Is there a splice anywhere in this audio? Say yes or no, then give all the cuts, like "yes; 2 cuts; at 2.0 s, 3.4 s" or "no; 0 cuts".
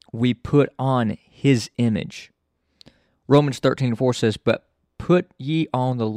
no; 0 cuts